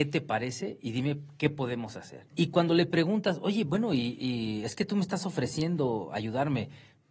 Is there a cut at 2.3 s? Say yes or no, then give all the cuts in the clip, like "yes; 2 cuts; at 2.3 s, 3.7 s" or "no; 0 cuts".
yes; 1 cut; at 2.3 s